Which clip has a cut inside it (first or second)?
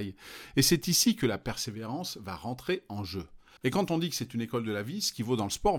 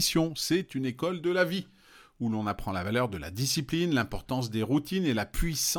first